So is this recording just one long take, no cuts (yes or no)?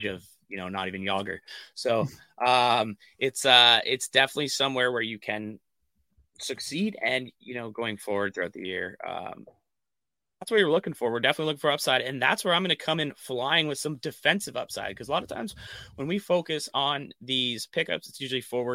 yes